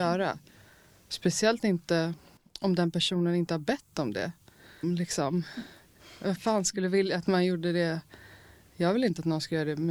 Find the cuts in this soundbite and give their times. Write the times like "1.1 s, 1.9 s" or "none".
4.8 s